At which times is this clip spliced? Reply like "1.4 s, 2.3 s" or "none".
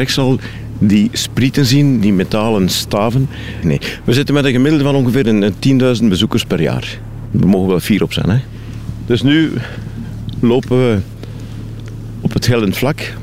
2.0 s, 3.6 s